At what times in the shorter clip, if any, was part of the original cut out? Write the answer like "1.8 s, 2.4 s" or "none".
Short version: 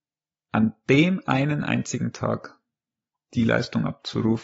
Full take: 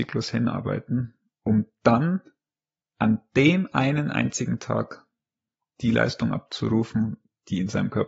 none

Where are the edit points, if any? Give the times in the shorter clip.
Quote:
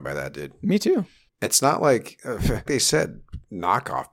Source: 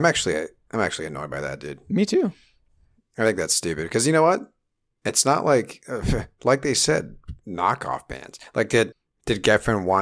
1.3 s, 2.7 s

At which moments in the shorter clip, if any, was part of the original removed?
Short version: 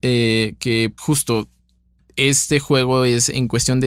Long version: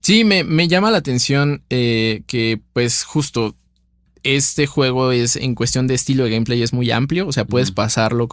1.0 s

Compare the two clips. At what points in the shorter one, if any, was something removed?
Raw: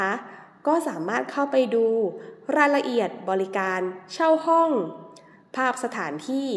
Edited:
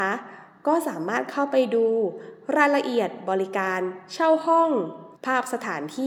5.2 s

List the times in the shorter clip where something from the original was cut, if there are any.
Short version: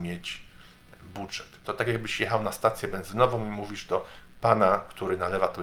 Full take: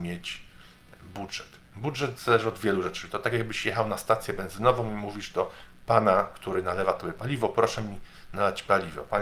1.6 s

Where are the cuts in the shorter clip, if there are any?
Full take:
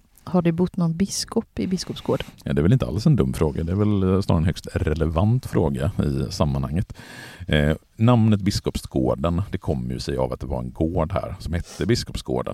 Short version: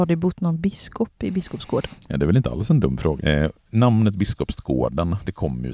3.2 s

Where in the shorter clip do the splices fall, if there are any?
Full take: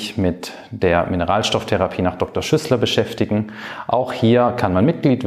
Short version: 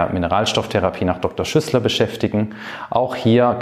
none

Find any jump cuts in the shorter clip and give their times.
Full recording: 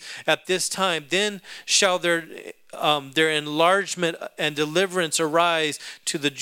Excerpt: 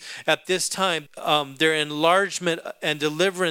1.1 s

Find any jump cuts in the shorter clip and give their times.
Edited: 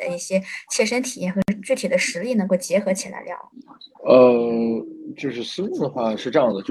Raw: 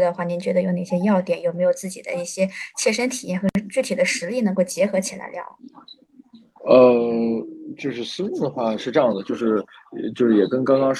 3.9 s

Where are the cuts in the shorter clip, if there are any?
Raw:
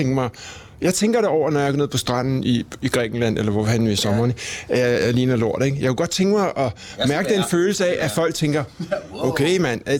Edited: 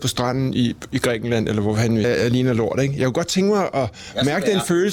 2.0 s

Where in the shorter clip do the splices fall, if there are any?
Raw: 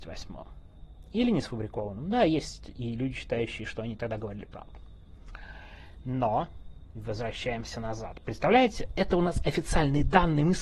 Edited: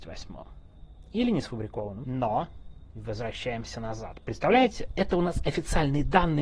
2.0 s

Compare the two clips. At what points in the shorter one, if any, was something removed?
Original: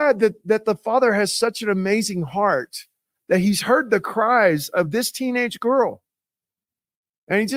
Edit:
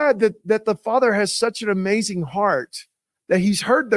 none

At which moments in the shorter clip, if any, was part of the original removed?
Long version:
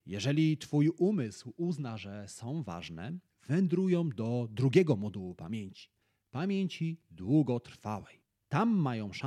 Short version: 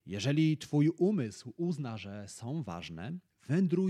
none

